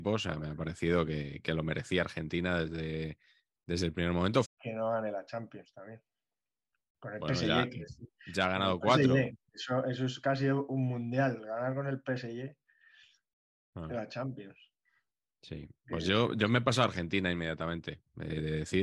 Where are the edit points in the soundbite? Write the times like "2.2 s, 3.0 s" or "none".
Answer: 4.4 s